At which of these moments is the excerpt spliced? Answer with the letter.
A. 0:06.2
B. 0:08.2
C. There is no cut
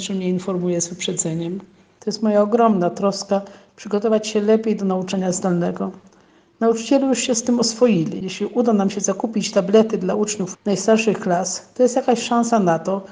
C